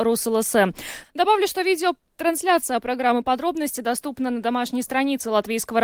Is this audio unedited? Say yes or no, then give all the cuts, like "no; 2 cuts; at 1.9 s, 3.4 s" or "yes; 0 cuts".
no; 1 cut; at 1.0 s